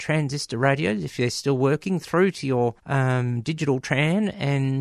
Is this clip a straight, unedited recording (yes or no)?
no